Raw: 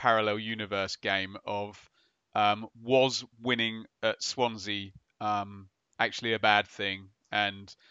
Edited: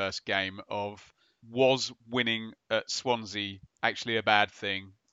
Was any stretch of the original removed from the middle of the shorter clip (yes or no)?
yes